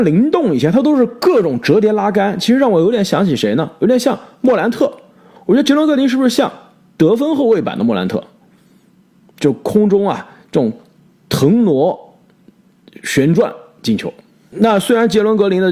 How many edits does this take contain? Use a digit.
0